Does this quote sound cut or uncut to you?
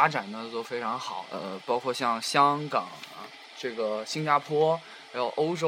cut